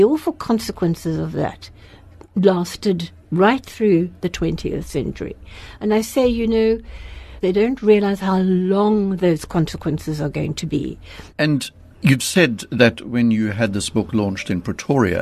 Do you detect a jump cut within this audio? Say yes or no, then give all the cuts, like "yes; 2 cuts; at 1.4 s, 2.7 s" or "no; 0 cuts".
yes; 2 cuts; at 7.4 s, 11.3 s